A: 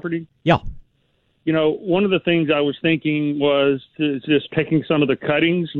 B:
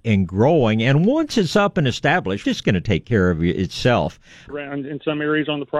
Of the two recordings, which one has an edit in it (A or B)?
B